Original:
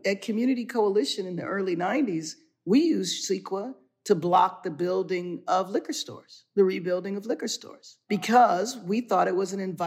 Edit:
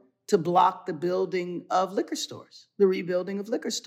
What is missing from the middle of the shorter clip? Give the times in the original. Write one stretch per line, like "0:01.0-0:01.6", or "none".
none